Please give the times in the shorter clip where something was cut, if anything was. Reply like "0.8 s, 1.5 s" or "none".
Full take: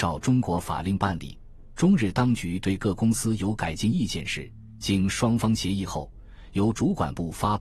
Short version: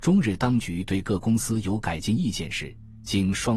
none